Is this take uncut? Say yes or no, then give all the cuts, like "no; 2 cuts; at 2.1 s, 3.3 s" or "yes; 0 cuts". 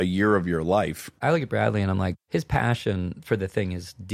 yes; 0 cuts